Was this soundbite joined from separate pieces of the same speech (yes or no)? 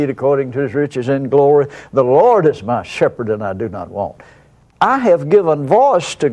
no